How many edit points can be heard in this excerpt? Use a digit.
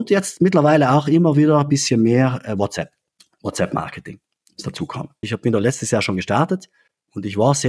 1